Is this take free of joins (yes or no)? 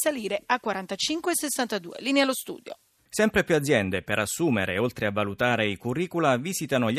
no